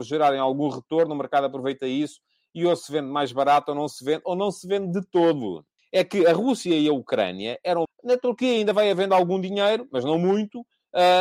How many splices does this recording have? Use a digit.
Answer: 2